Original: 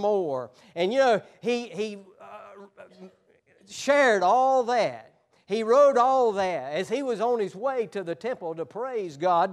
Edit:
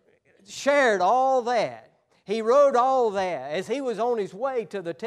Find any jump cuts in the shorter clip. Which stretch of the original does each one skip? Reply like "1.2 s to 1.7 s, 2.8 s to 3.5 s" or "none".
none